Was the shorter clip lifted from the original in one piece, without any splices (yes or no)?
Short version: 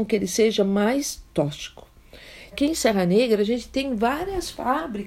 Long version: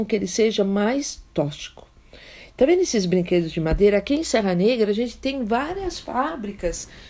no